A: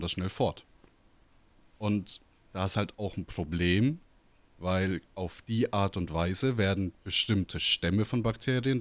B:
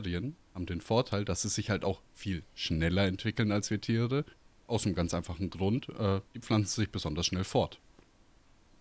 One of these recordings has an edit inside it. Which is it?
B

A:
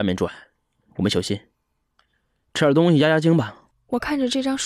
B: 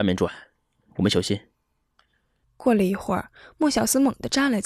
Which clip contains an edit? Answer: B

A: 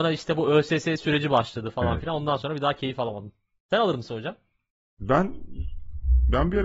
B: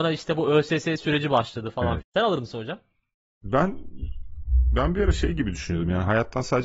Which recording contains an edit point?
B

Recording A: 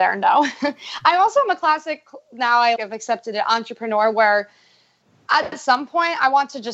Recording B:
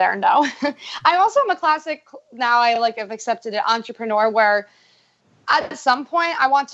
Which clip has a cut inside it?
A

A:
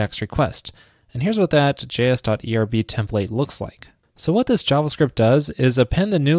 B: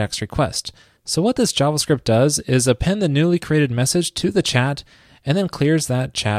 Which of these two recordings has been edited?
B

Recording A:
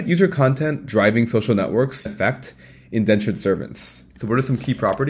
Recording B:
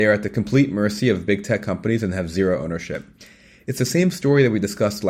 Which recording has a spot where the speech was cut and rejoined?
A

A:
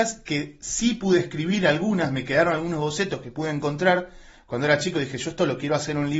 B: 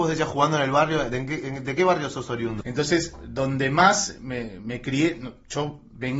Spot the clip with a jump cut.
B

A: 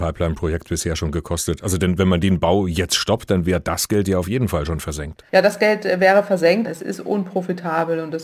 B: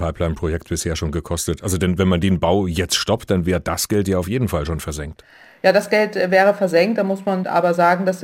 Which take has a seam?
A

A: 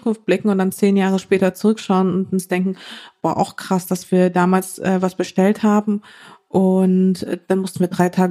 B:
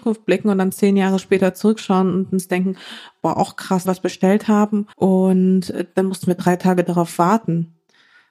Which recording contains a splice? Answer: B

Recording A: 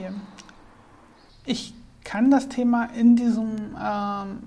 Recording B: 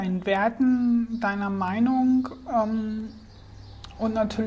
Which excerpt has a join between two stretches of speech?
A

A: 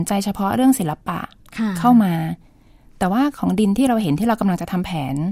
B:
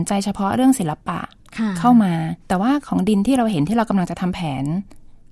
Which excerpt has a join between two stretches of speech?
B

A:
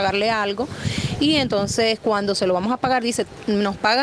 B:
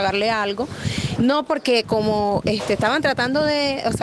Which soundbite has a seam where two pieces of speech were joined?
B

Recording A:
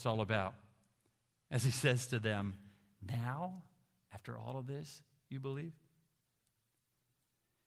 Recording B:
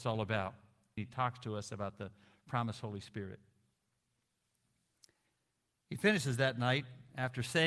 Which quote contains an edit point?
B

